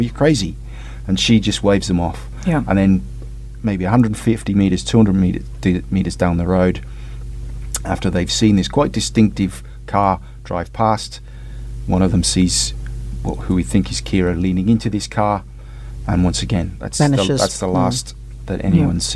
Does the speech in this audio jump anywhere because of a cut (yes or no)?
no